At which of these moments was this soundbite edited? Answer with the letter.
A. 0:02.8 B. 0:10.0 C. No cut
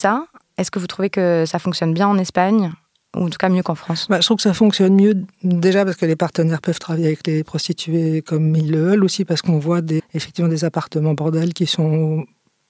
B